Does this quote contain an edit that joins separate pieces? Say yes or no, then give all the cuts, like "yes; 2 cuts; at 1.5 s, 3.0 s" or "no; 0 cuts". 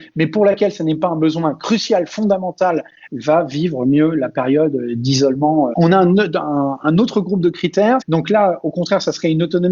yes; 2 cuts; at 5.7 s, 8.0 s